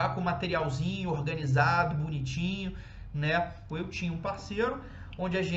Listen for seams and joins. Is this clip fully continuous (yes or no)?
no